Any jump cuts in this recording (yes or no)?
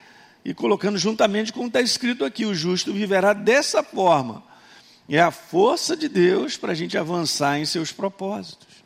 no